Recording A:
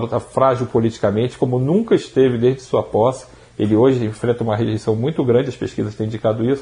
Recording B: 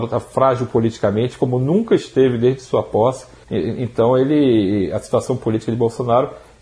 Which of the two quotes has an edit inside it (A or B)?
B